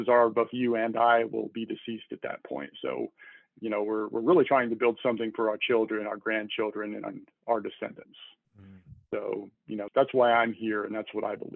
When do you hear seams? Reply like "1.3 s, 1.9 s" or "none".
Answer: 9.9 s